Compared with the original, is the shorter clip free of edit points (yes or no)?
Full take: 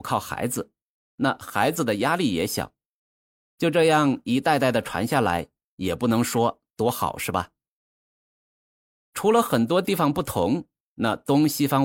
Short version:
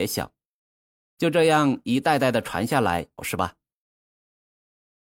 no